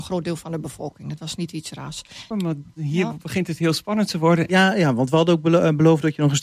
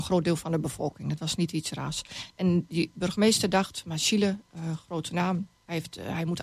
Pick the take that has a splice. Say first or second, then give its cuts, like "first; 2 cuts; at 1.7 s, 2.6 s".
first; 2 cuts; at 2.3 s, 4.5 s